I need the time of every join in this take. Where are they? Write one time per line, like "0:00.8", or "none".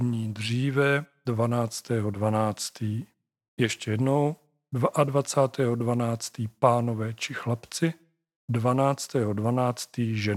none

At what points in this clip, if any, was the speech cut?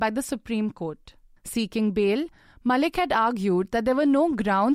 none

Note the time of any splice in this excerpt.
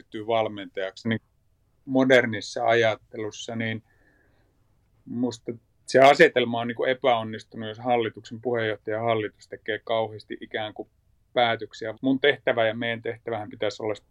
0:01.0
0:11.9

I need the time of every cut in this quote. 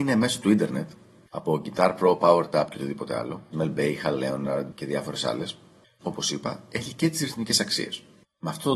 0:03.5
0:06.0

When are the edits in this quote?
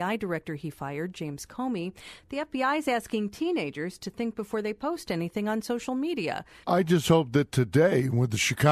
0:06.6

